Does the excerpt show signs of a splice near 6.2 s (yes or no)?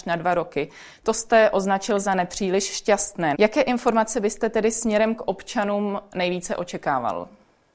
no